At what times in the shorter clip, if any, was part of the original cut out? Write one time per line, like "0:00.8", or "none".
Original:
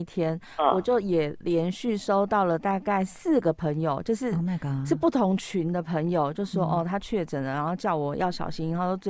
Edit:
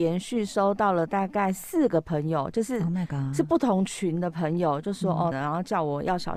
0:05.3